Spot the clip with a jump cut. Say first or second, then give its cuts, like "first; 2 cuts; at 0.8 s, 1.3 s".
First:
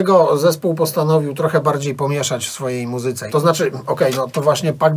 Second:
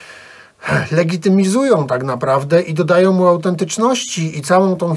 first; 1 cut; at 3.3 s